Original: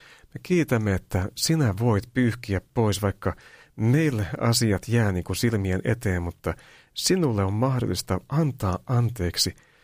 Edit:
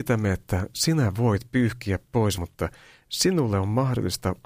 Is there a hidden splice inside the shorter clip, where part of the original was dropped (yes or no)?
yes